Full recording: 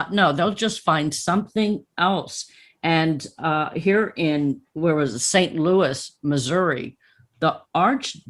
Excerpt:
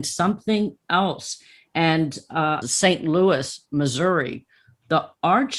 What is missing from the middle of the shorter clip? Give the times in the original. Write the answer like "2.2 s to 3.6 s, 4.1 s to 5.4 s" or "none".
3.7 s to 5.1 s